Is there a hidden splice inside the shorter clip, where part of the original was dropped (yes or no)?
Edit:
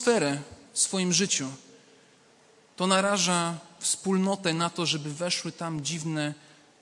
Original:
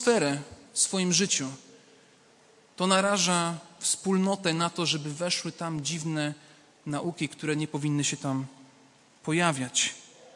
no